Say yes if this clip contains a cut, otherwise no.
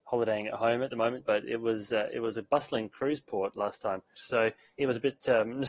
yes